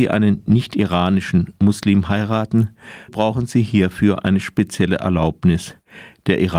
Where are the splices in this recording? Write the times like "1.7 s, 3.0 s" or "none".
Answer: 3.1 s